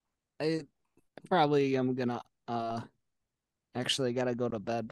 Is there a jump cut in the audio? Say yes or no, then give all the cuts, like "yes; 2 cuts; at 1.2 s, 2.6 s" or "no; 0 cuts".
no; 0 cuts